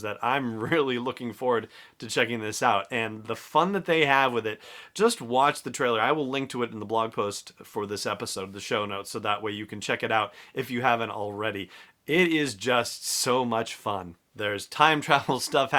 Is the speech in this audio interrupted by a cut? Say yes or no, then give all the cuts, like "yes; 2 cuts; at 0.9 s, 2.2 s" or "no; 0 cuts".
no; 0 cuts